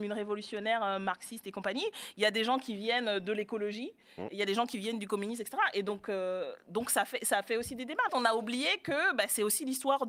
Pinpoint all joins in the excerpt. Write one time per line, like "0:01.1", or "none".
0:08.1